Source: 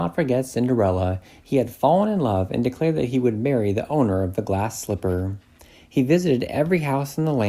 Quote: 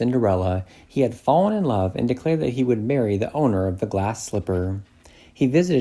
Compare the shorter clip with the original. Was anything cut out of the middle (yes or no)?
no